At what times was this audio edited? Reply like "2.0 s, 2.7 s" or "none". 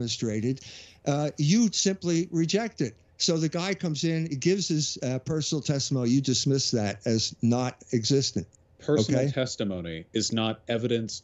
none